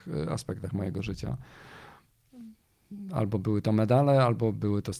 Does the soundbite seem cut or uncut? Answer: uncut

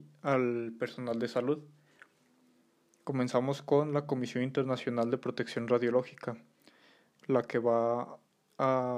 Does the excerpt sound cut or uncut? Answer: cut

